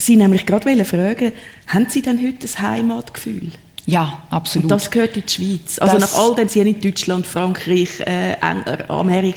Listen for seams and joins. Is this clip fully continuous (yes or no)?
yes